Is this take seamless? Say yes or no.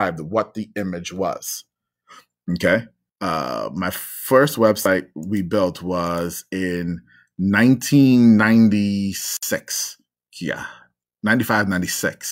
no